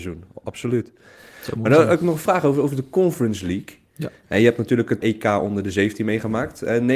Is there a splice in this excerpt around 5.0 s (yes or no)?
yes